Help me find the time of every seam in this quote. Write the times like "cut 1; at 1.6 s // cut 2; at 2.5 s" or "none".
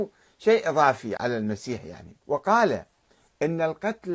cut 1; at 1.2 s // cut 2; at 2.2 s